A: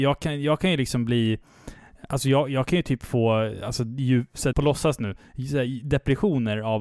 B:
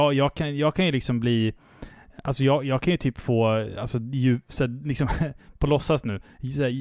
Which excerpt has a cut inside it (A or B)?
A